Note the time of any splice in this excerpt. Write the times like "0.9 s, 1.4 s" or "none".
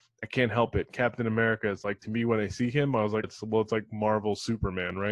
3.2 s